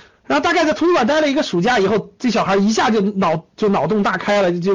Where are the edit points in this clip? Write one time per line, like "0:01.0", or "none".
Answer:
none